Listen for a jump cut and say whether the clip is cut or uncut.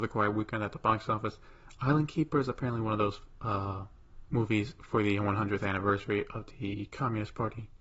uncut